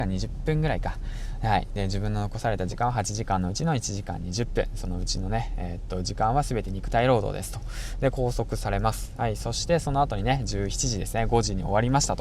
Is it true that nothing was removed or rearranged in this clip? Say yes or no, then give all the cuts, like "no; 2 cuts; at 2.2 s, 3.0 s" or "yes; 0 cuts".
yes; 0 cuts